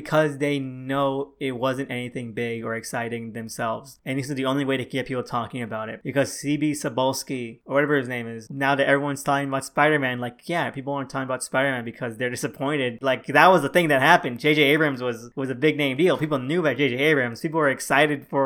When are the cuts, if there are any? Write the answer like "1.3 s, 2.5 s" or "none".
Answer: 8.5 s, 13.0 s